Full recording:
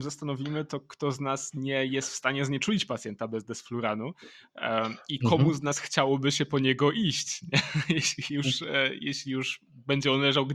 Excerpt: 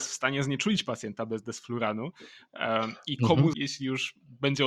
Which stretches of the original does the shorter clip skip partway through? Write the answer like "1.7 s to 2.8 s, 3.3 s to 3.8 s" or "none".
5.6 s to 9.0 s